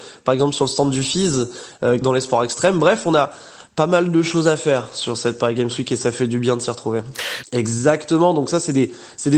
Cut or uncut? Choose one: cut